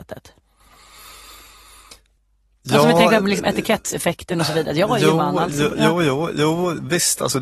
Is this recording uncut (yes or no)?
yes